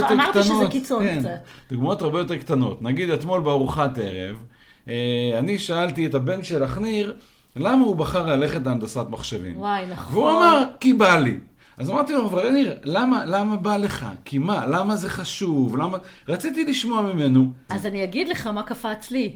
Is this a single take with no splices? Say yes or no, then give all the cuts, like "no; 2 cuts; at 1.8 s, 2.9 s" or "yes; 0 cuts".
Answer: no; 1 cut; at 17.7 s